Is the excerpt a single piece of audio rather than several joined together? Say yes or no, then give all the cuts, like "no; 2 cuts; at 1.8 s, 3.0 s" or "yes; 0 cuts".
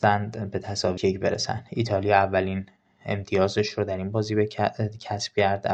no; 1 cut; at 1.0 s